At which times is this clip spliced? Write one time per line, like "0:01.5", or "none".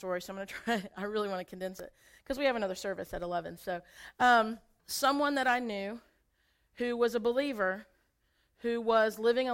0:04.8